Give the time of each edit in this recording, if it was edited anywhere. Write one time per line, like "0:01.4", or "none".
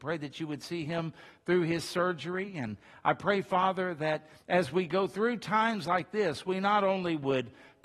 none

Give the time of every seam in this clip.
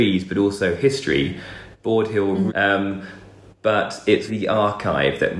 0:02.5
0:04.3

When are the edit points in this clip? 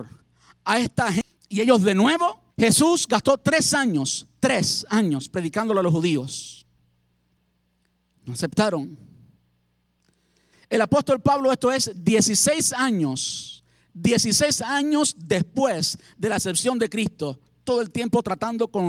0:02.5

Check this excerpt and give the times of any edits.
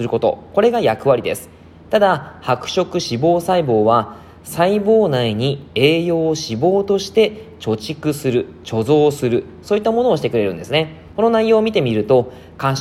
0:11.1

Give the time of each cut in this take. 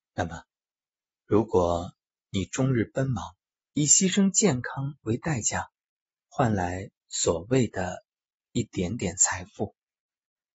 none

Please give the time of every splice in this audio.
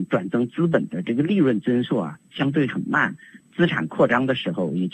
0:03.4

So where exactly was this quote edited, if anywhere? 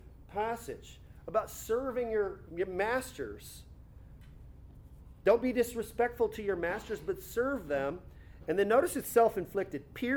0:02.5
0:08.4

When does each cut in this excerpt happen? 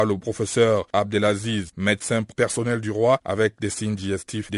0:03.2

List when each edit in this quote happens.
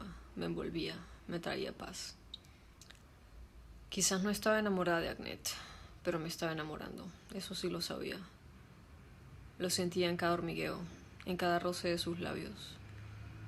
none

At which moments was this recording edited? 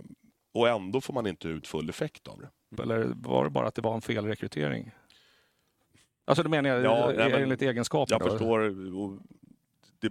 0:02.7

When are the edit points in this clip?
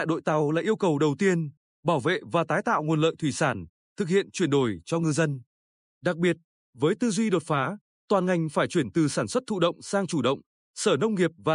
none

